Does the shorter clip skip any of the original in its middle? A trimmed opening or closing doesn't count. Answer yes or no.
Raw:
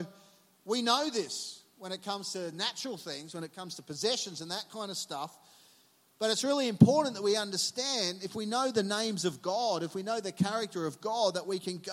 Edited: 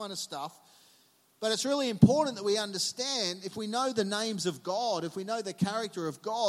no